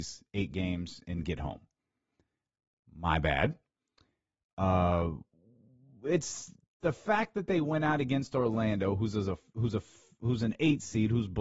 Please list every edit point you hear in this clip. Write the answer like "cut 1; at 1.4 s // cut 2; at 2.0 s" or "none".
none